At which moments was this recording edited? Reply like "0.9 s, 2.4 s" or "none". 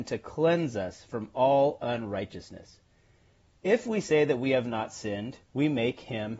5.4 s